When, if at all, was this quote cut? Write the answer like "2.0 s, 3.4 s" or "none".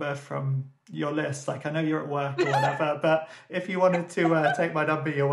3.5 s